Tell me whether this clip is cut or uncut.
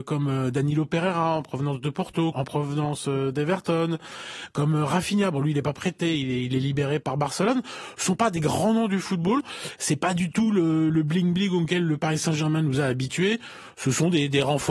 cut